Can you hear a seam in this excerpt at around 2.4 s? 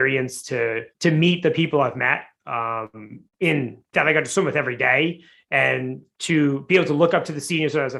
no; 2 cuts; at 0.9 s, 3.9 s

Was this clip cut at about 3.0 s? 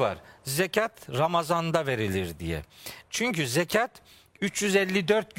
yes; 1 cut; at 3.0 s

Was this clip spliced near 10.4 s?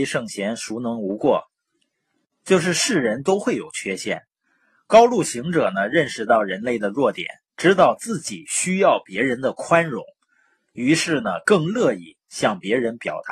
no; 0 cuts

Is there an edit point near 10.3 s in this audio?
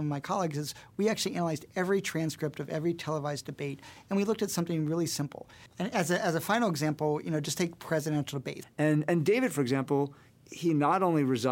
yes; 3 cuts; at 5.7 s, 8.6 s, 10.3 s

